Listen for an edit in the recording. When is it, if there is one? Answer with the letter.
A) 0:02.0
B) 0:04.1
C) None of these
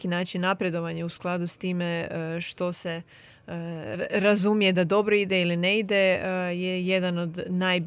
C